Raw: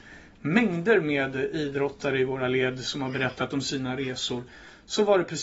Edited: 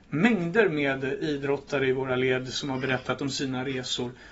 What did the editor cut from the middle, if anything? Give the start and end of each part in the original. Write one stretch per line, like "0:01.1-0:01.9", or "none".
none